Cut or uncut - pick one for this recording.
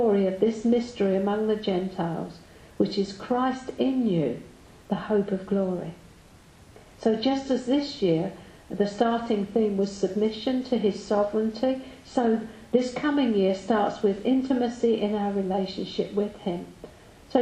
uncut